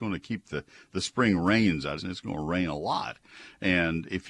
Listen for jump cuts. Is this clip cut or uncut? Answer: cut